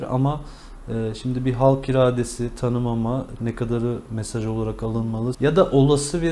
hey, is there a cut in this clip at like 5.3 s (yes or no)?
yes